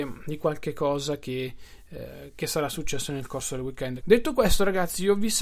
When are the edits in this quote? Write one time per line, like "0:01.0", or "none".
0:04.0